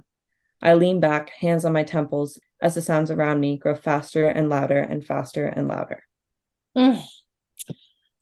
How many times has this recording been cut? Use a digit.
1